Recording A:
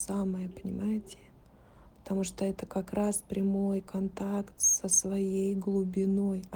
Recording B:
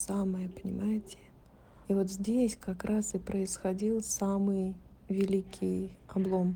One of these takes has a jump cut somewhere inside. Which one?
B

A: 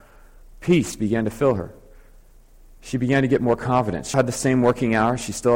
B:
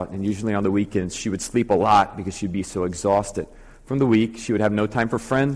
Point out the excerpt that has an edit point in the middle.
A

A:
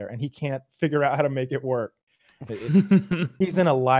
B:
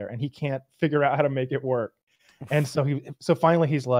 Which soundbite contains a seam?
A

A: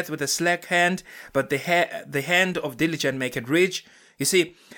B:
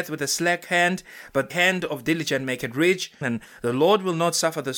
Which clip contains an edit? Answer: B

